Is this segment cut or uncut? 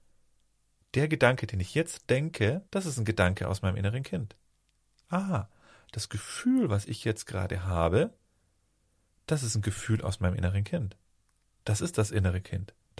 cut